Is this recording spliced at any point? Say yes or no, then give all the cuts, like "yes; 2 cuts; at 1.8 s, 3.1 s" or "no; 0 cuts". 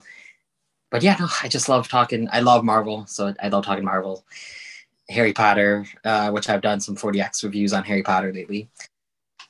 no; 0 cuts